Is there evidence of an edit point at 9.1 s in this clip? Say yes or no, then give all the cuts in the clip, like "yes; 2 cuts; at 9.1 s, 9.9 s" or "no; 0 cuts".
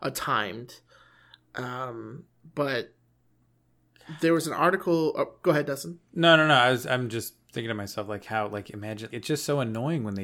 yes; 1 cut; at 9.1 s